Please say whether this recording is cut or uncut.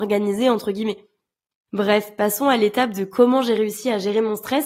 uncut